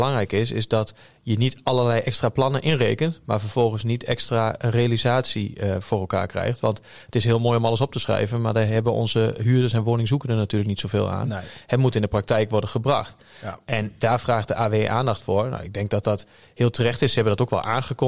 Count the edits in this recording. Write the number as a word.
zero